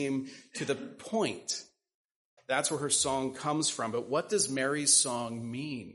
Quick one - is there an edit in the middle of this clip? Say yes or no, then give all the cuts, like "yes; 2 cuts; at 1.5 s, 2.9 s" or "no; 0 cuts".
yes; 1 cut; at 2.4 s